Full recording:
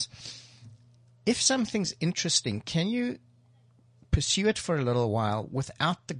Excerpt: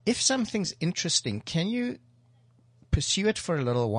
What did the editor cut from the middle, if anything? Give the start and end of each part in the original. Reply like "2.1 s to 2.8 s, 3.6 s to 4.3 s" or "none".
none